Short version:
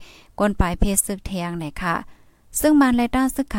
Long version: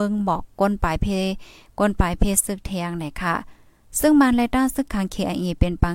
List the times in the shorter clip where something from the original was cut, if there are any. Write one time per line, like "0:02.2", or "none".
none